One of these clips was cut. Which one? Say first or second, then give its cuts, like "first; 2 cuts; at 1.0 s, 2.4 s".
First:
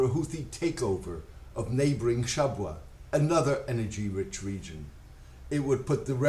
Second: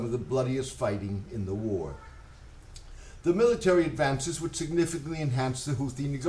second; 1 cut; at 3.2 s